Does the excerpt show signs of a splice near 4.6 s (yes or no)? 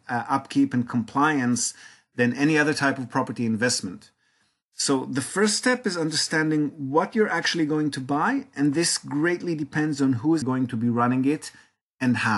no